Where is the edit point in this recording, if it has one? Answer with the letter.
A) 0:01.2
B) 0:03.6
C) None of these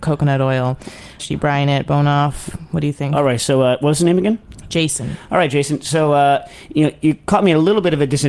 A